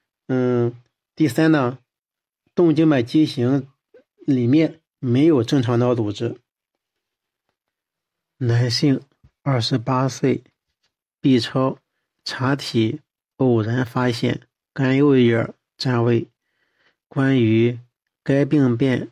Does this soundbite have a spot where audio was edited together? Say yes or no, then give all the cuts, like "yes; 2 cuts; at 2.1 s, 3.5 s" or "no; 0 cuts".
no; 0 cuts